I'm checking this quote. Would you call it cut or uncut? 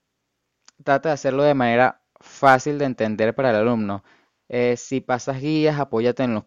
uncut